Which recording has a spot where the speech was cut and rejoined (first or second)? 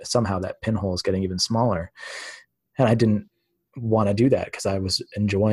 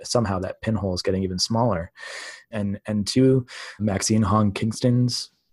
second